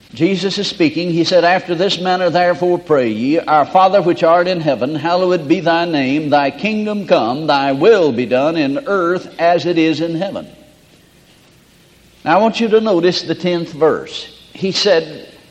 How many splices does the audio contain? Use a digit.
0